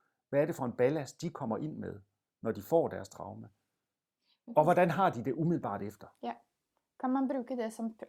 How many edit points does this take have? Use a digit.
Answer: 0